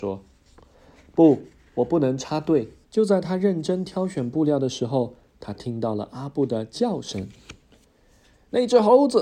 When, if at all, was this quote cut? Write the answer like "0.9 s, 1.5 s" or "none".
2.8 s